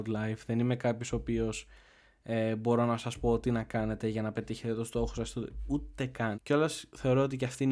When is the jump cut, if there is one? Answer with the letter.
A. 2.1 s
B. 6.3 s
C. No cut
B